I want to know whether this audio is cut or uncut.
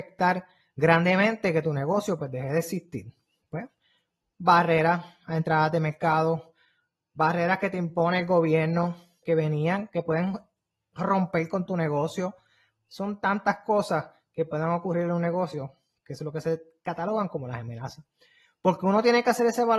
cut